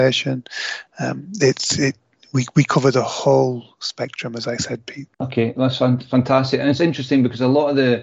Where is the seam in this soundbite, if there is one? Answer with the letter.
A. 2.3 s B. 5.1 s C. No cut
B